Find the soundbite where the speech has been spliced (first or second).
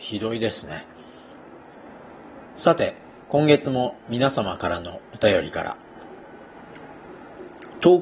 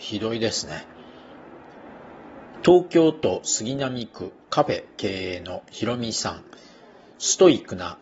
second